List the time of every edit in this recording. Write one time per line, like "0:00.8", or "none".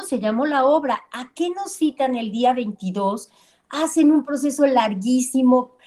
none